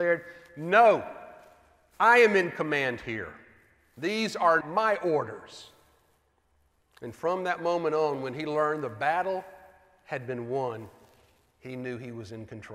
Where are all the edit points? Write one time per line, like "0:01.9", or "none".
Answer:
0:04.6